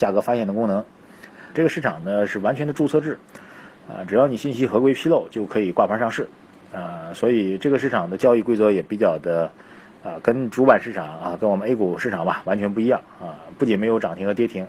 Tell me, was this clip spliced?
yes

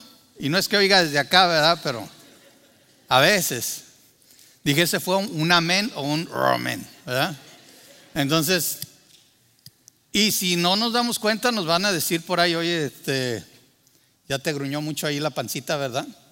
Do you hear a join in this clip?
no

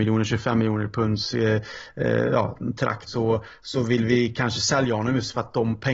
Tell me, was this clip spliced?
yes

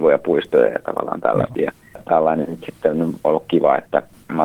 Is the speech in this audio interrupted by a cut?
yes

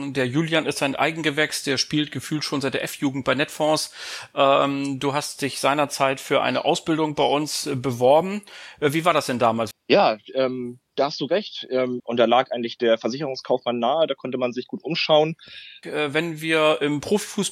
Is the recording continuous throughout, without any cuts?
no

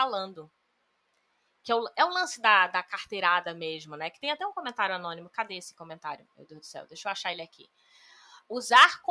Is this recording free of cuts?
yes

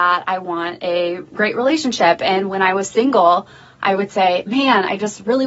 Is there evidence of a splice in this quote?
no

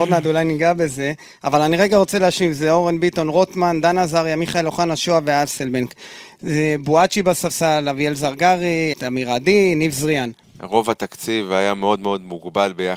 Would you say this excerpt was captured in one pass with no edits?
no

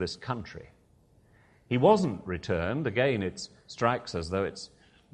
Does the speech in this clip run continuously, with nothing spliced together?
yes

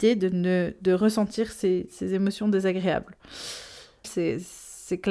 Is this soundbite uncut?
no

